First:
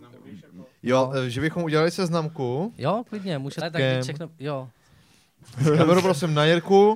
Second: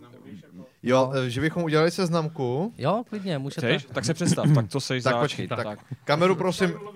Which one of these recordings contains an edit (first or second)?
first